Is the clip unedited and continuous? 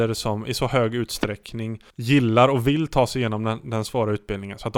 no; 1 cut; at 1.9 s

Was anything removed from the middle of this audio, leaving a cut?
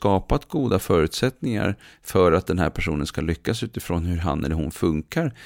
no; 0 cuts

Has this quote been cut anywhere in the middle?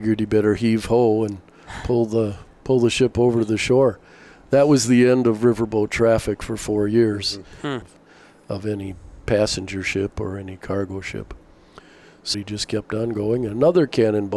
yes; 2 cuts; at 7.8 s, 12.3 s

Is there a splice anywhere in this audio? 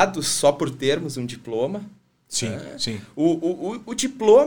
no; 0 cuts

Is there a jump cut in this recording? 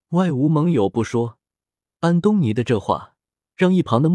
yes; 1 cut; at 1.9 s

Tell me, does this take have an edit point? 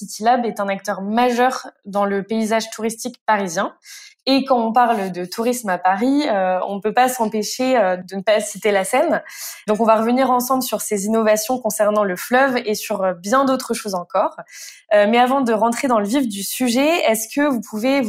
no; 0 cuts

